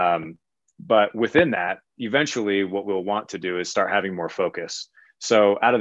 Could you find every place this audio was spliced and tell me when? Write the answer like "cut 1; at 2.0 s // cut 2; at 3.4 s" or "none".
cut 1; at 1.9 s